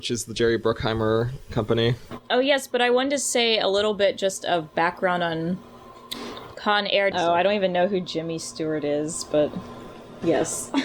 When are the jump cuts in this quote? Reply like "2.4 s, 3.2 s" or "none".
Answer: 7.1 s